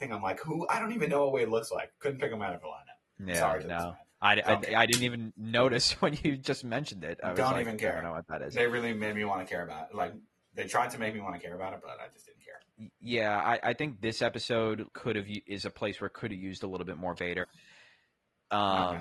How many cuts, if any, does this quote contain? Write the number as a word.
two